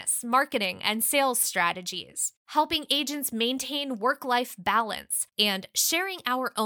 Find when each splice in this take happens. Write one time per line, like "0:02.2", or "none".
0:02.4
0:05.3